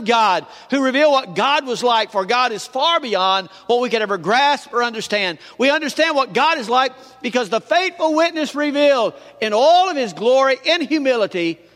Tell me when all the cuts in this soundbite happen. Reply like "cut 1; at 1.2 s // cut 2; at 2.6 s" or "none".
none

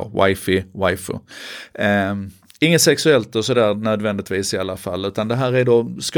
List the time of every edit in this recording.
none

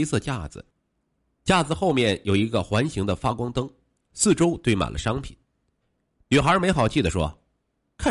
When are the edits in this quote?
none

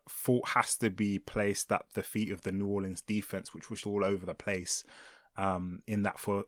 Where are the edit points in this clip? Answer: cut 1; at 3.8 s

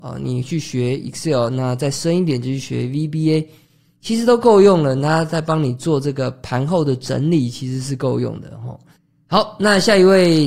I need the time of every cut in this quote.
none

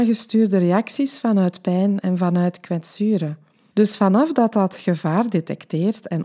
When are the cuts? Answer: cut 1; at 3.7 s

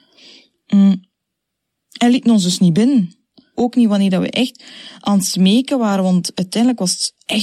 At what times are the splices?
cut 1; at 3.5 s

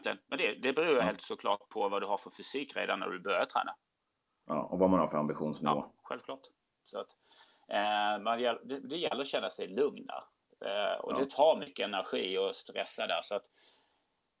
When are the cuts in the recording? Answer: cut 1; at 6.8 s

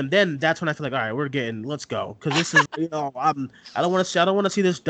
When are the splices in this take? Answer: cut 1; at 2.7 s

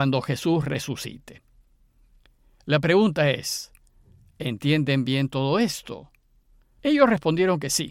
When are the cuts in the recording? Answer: cut 1; at 2.6 s // cut 2; at 6.8 s

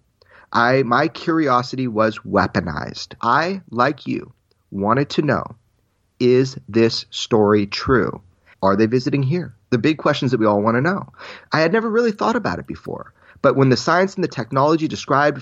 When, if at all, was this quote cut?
cut 1; at 3.2 s // cut 2; at 8.5 s

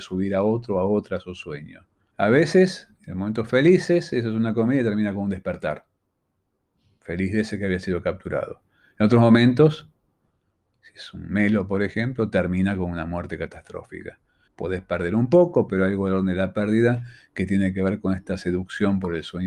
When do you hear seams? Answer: cut 1; at 2.1 s // cut 2; at 14.5 s // cut 3; at 15.7 s

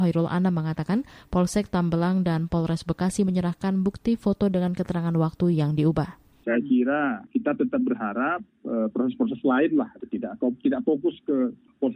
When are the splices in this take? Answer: cut 1; at 6.4 s

